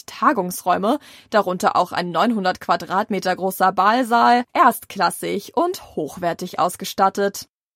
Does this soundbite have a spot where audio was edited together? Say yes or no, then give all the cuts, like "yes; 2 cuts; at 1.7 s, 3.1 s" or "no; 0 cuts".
no; 0 cuts